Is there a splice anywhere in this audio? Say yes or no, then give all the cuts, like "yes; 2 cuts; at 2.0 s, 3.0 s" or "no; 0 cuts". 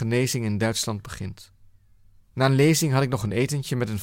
yes; 1 cut; at 2.2 s